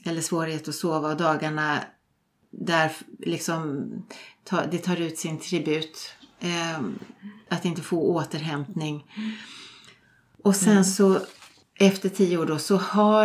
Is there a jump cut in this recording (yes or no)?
no